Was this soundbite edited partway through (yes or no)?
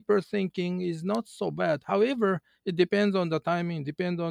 no